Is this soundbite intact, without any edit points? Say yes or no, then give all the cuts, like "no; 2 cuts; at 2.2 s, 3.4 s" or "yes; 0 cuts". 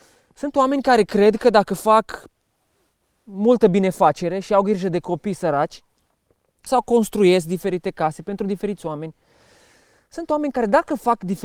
no; 1 cut; at 6.7 s